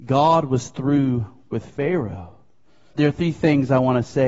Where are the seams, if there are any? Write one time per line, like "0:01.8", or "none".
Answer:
0:02.9